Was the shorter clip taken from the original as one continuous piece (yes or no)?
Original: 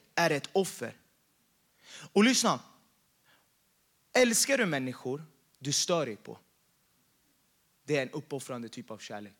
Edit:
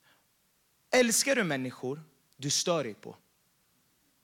yes